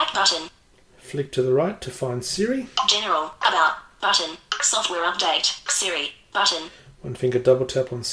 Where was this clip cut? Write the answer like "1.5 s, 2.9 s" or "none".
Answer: 3.4 s, 5.7 s